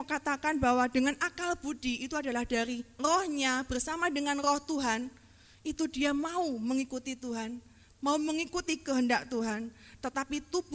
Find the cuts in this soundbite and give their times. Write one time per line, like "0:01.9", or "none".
none